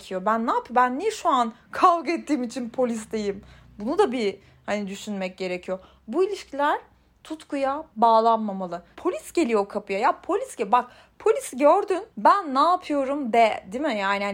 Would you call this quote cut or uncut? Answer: cut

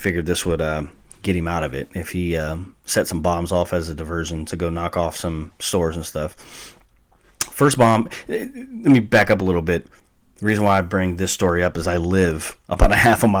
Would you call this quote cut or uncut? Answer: uncut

